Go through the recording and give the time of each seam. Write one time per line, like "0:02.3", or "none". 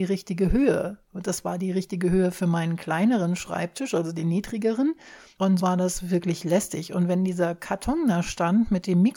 0:05.6